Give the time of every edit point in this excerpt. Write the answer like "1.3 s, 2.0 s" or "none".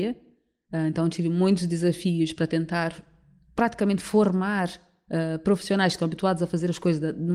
none